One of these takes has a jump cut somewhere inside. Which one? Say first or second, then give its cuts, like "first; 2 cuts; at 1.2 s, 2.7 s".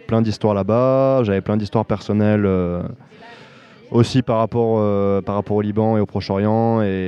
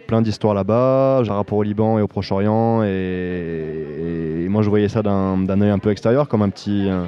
second; 1 cut; at 1.3 s